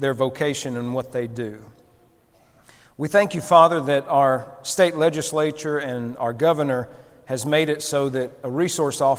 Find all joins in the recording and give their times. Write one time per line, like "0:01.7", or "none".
none